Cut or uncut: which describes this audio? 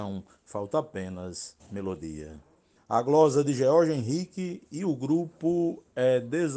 cut